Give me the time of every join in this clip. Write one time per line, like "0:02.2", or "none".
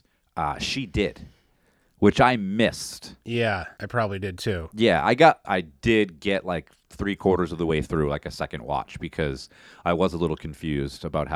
0:05.4